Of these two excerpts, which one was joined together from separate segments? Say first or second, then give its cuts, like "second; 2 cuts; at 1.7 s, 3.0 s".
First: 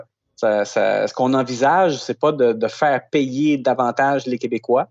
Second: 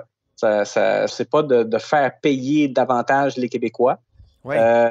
second; 1 cut; at 1.1 s